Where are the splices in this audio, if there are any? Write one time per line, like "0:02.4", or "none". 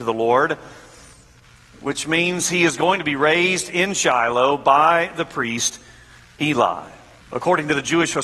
0:07.2